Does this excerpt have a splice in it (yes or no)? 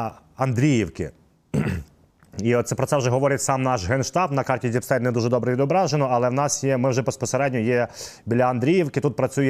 no